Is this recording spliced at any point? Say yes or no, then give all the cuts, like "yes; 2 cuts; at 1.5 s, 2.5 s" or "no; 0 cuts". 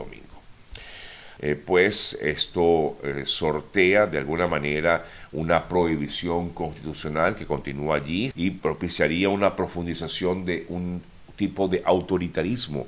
yes; 2 cuts; at 1.4 s, 8.3 s